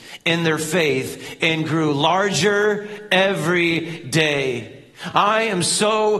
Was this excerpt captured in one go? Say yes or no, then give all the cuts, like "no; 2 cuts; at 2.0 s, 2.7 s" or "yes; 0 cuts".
yes; 0 cuts